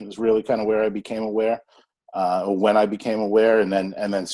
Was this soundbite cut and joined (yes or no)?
no